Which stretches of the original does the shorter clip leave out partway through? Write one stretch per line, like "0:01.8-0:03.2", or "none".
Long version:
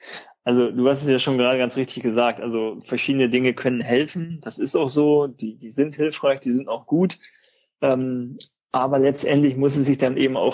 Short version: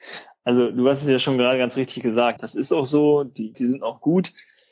0:02.4-0:04.4
0:05.6-0:06.4